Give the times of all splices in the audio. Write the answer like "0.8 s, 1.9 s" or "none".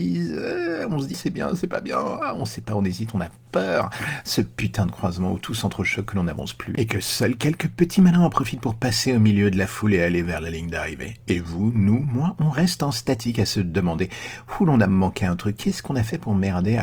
1.1 s